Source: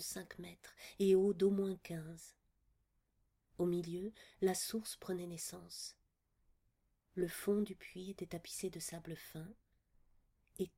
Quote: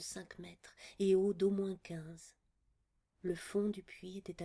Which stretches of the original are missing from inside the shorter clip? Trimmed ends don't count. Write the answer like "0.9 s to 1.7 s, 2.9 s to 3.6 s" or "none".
3.1 s to 7.0 s